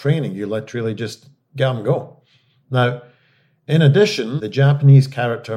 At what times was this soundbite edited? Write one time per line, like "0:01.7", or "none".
0:04.4